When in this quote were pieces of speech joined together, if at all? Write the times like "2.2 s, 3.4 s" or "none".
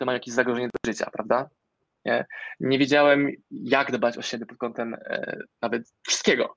2.0 s

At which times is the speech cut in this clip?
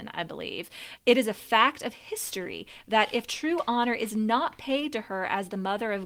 1.0 s

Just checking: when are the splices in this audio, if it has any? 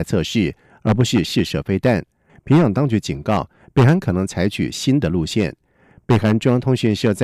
2.3 s

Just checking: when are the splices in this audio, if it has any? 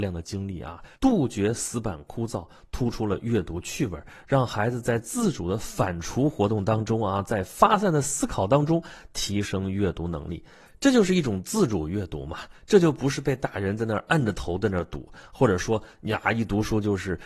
1.0 s

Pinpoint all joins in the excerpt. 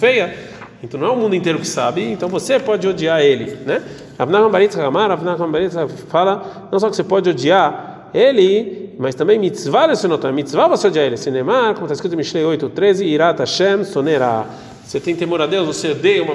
none

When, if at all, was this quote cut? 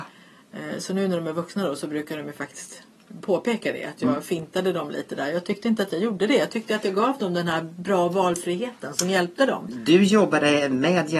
none

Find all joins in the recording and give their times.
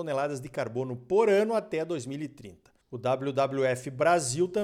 2.8 s

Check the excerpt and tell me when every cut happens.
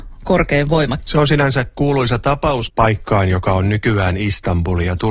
1.0 s, 2.7 s

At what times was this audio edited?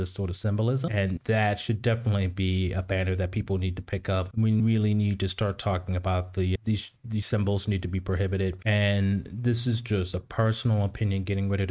none

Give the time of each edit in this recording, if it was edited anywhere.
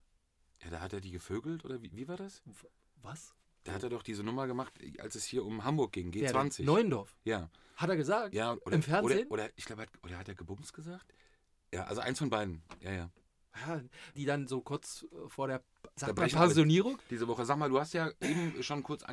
14.1 s, 17.0 s

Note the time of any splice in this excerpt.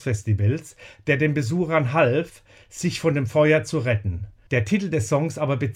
4.5 s

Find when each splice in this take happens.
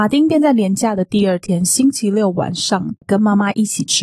3.0 s

